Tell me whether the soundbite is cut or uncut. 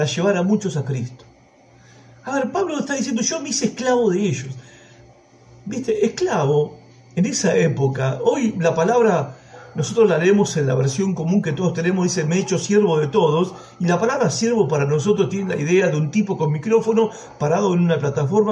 uncut